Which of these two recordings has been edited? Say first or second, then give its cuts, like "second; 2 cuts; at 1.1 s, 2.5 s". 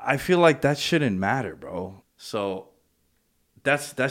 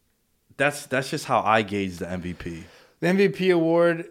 first; 1 cut; at 2.0 s